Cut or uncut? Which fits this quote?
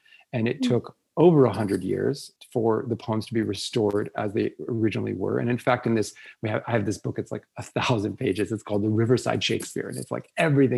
uncut